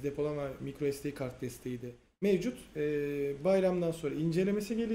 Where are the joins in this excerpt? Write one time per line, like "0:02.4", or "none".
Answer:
none